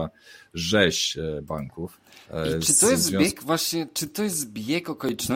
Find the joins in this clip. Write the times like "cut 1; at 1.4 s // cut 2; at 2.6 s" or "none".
cut 1; at 2.2 s

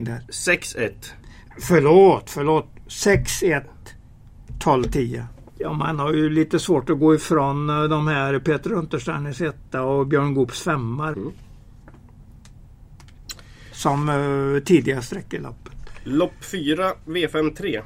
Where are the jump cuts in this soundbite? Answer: cut 1; at 5.5 s // cut 2; at 11.1 s

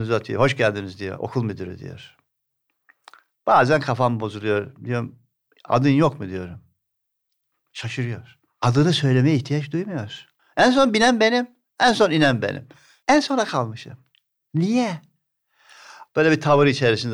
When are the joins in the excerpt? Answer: cut 1; at 10.4 s // cut 2; at 13.0 s // cut 3; at 16.1 s

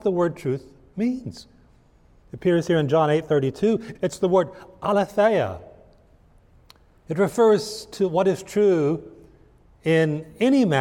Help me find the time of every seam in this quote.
cut 1; at 4.0 s

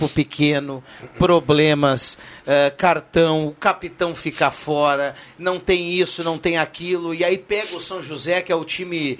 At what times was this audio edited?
none

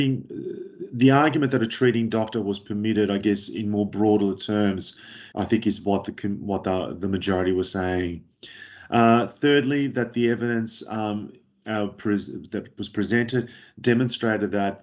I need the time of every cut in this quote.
cut 1; at 5.3 s

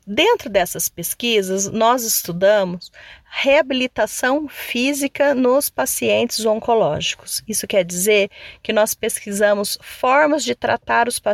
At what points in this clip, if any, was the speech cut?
none

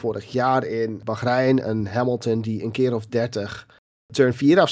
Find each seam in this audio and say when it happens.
none

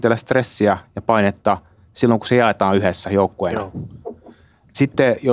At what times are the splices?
none

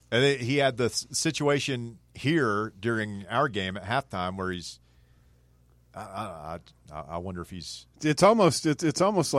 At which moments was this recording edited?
cut 1; at 7.9 s

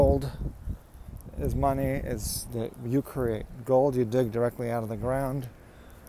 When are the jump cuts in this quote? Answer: cut 1; at 2.4 s

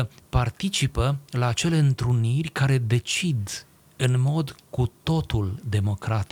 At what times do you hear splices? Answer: none

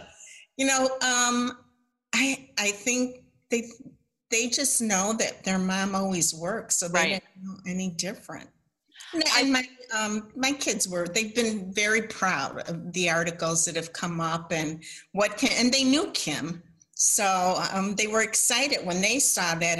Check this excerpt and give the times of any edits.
none

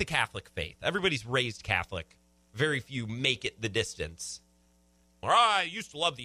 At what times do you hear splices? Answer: cut 1; at 5.2 s

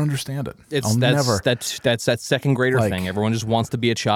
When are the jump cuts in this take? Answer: none

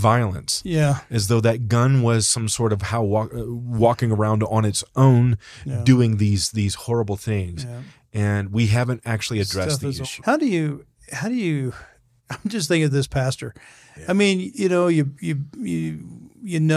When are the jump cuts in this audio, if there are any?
cut 1; at 10.2 s

